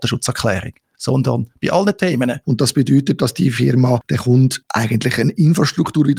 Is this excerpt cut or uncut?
cut